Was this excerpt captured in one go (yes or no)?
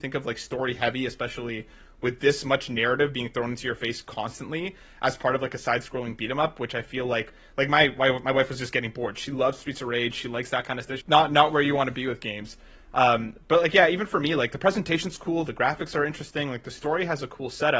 no